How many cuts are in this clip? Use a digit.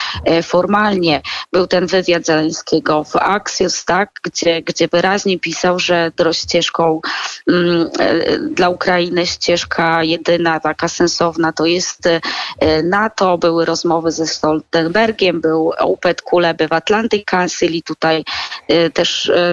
0